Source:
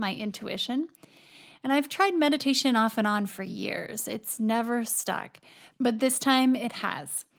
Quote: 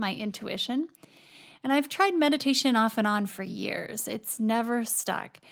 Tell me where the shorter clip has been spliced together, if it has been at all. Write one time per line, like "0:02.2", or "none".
none